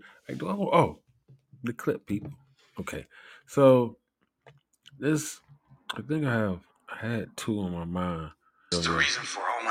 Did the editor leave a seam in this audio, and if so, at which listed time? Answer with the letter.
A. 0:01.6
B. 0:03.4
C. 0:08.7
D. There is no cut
C